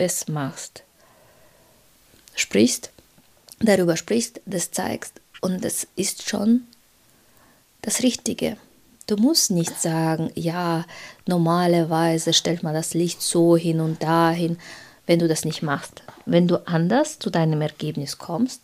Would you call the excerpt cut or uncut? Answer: uncut